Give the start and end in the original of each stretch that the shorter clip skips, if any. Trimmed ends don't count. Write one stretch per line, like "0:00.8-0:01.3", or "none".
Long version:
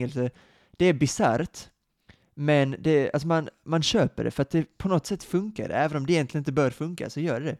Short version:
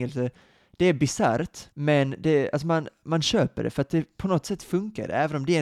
0:01.7-0:02.3